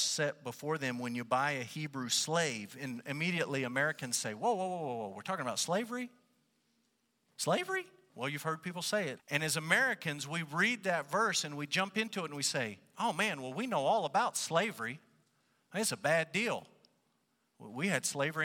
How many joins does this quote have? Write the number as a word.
two